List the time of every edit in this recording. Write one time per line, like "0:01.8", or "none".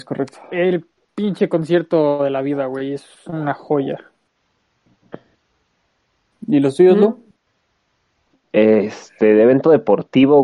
none